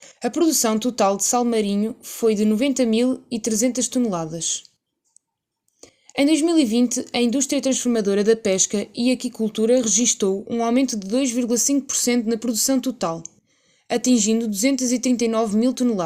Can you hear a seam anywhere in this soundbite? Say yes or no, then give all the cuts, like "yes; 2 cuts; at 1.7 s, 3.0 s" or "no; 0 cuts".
no; 0 cuts